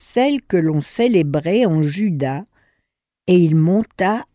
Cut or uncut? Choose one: uncut